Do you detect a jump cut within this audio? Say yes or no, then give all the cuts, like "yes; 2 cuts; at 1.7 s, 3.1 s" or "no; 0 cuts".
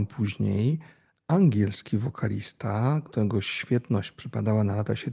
no; 0 cuts